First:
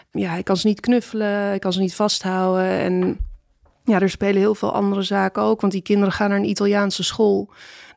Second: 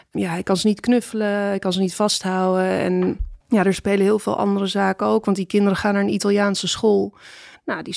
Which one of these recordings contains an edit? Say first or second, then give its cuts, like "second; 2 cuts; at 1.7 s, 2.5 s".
second; 1 cut; at 3.4 s